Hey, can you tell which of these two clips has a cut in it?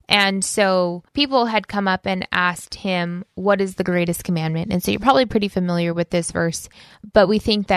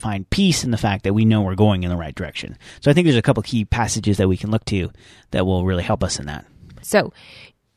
second; 1 cut; at 6.8 s

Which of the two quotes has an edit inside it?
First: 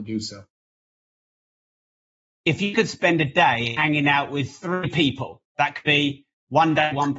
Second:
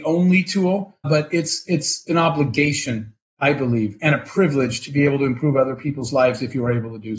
second; 1 cut; at 1.0 s

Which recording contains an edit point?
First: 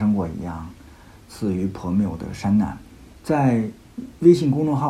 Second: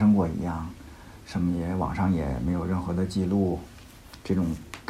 first; 2 cuts; at 1.2 s, 3.2 s

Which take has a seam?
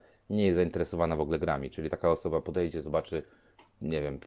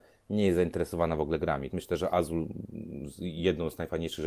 second; 1 cut; at 1.7 s

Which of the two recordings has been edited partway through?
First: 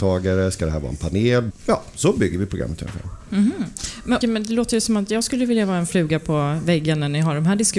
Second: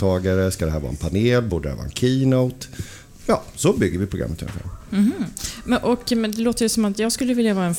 first; 2 cuts; at 1.5 s, 4.2 s

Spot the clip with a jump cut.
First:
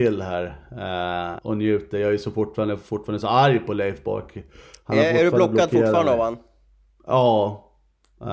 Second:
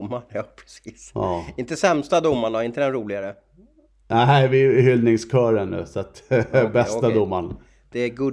first; 1 cut; at 1.4 s

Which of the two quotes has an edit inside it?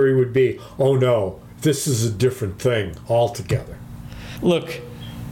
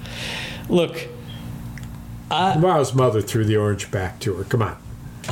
first; 1 cut; at 4.4 s

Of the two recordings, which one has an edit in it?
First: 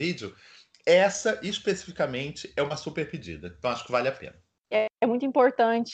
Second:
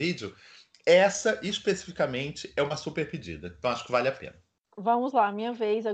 first; 1 cut; at 4.7 s

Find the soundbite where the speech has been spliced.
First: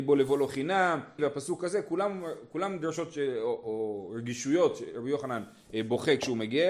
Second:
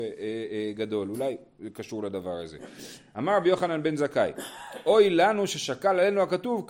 first; 1 cut; at 1.2 s

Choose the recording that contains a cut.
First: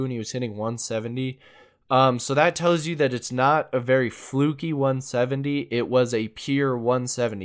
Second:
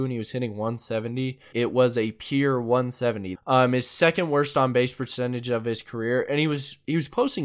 second; 2 cuts; at 1.5 s, 3.4 s

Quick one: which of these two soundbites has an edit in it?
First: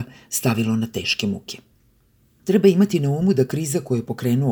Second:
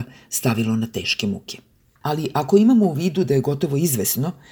second; 1 cut; at 1.8 s

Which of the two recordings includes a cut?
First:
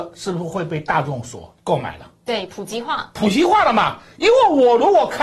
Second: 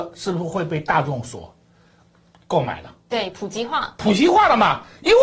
first; 1 cut; at 1.6 s

